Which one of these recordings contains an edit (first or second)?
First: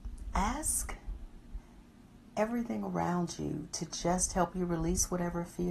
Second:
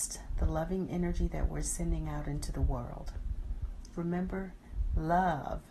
second